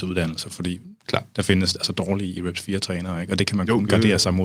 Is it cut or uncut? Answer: uncut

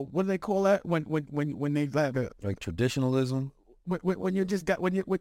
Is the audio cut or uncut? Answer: cut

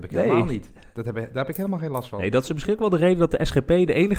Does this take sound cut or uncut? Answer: uncut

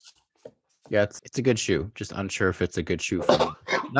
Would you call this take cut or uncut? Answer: cut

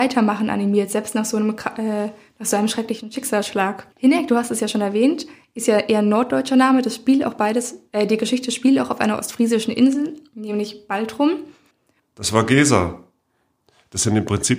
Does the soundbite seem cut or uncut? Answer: cut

